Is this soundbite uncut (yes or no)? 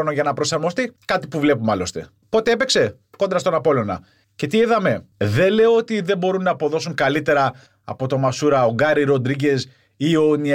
no